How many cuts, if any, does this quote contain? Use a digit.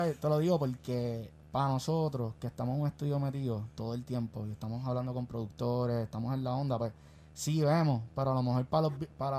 0